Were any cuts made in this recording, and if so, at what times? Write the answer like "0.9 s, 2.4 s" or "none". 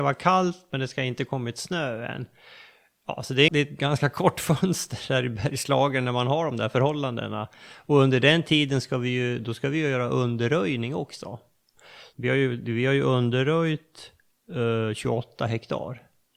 3.5 s, 12.1 s